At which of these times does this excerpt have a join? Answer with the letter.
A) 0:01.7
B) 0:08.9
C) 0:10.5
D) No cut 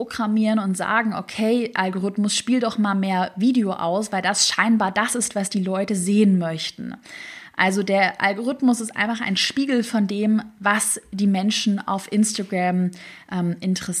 D